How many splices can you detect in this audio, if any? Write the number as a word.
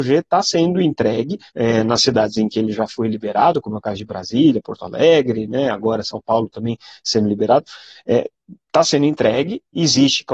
one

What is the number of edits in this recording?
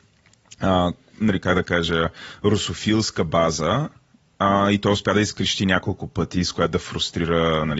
one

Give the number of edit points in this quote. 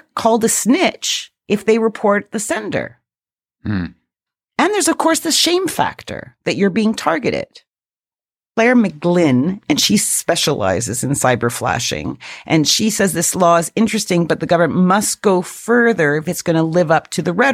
one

